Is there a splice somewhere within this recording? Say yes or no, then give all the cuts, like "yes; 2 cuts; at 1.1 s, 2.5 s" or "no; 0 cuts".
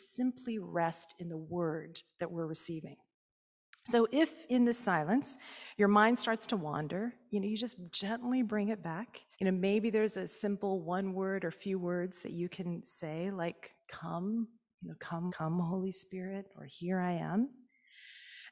yes; 2 cuts; at 9.3 s, 15.3 s